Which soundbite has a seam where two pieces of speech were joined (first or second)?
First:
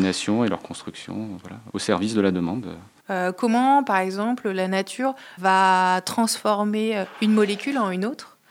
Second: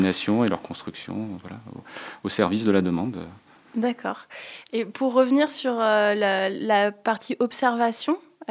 first